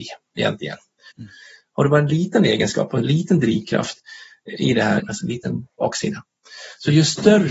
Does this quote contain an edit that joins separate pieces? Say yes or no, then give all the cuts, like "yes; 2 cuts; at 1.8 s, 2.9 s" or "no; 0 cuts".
yes; 2 cuts; at 1.1 s, 5.0 s